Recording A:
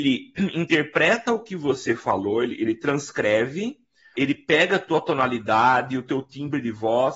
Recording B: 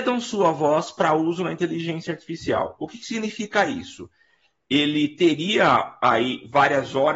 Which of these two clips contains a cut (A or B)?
A